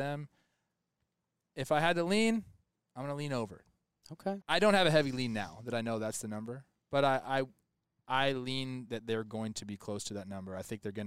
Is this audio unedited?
no; 1 cut; at 4.4 s

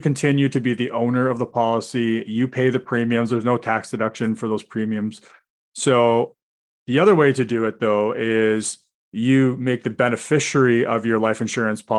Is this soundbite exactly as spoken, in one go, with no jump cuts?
no; 1 cut; at 5.6 s

